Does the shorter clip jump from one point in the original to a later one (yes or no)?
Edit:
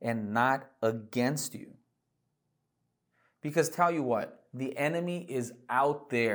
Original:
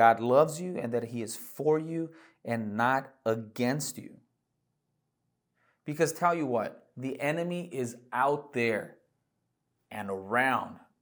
no